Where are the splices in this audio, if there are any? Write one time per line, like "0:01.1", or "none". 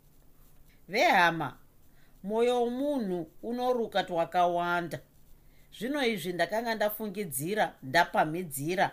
none